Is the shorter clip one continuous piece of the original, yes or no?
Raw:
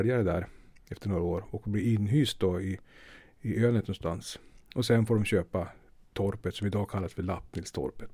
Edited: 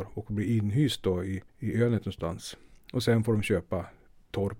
no